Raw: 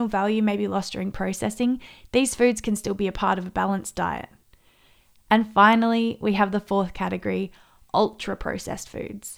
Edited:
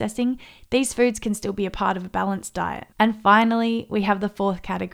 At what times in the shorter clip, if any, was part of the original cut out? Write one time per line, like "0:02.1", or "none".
0:02.9